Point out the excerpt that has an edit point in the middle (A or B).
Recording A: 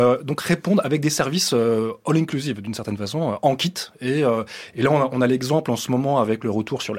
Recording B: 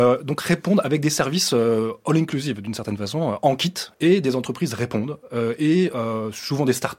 B